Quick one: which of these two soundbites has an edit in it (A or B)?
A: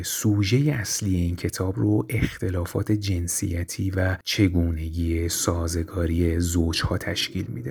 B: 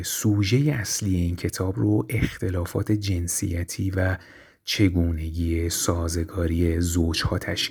A